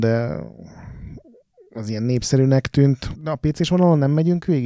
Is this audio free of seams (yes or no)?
no